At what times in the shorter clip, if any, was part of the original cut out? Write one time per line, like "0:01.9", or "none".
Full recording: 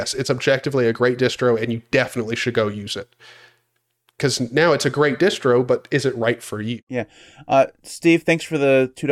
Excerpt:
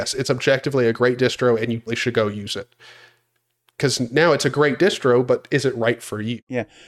0:01.9